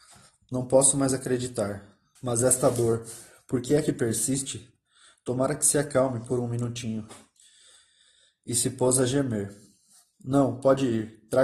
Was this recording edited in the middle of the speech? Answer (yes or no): yes